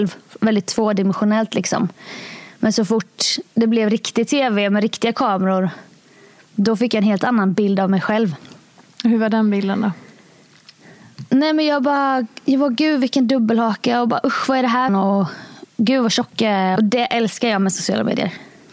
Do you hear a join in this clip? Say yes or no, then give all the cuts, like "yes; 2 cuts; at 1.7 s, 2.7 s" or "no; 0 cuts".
yes; 2 cuts; at 14.9 s, 16.8 s